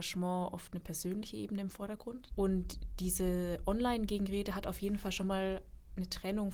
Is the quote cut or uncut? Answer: cut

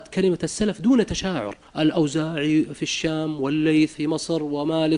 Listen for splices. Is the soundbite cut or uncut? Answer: cut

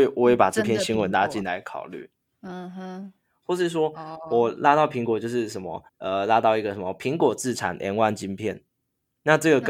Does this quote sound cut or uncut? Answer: cut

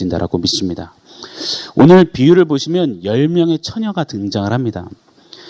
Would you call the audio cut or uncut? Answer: uncut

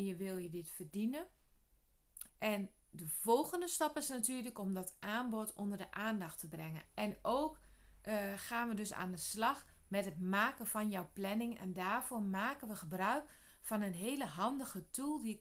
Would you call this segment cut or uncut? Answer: cut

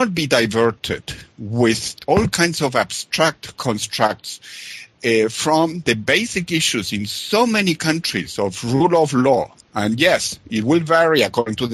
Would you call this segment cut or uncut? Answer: uncut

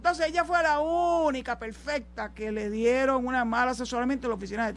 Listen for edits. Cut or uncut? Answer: uncut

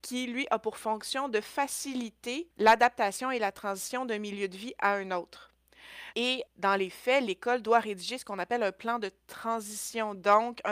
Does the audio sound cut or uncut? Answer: cut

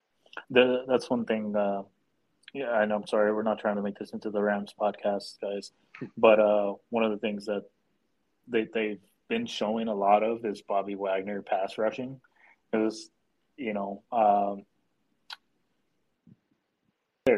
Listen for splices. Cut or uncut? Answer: uncut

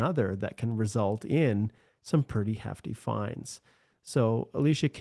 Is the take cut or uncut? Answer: uncut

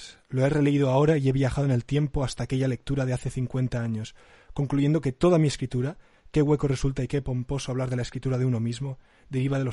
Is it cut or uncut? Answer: uncut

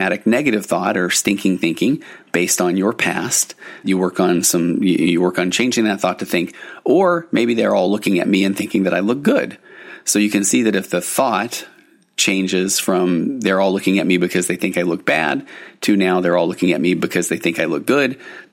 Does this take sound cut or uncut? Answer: cut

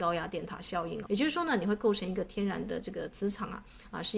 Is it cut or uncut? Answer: cut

